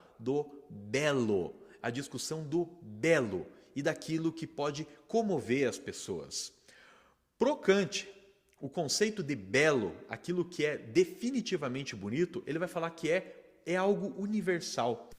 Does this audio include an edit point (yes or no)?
no